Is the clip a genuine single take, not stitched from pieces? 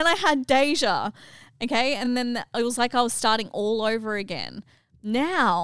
yes; 0 cuts

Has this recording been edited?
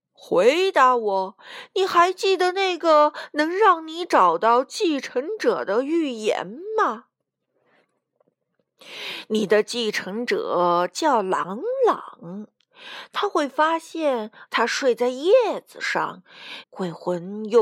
yes; 2 cuts; at 14.5 s, 16.6 s

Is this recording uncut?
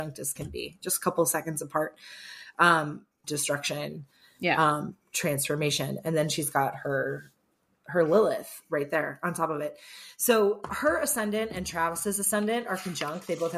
no; 1 cut; at 3.2 s

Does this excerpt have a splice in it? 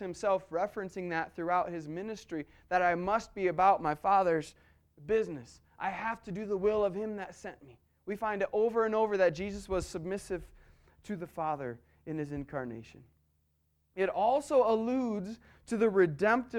no; 0 cuts

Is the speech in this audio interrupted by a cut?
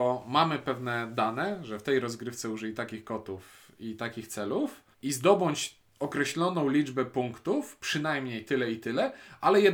yes; 1 cut; at 4.9 s

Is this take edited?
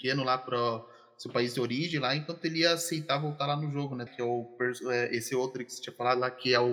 yes; 1 cut; at 4.1 s

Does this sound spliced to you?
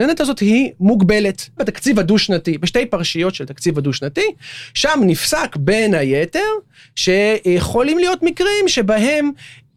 yes; 1 cut; at 1.6 s

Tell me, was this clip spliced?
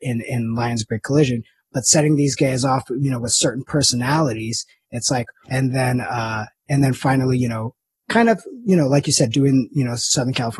yes; 1 cut; at 5.4 s

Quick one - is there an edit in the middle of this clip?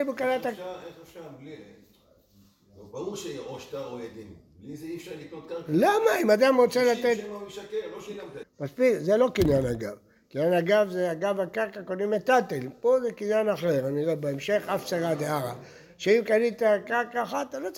yes; 1 cut; at 8.4 s

